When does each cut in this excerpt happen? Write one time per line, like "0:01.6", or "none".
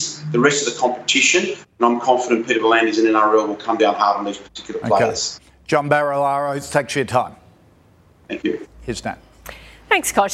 none